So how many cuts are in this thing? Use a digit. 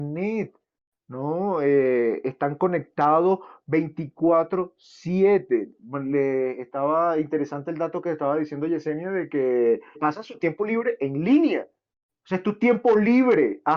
1